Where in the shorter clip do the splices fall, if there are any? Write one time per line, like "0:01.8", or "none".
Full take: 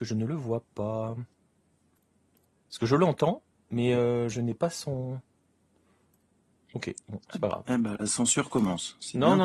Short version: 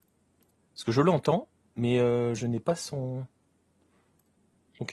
none